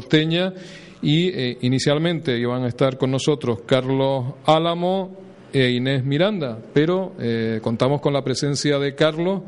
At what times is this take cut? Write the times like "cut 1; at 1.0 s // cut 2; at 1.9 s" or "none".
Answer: none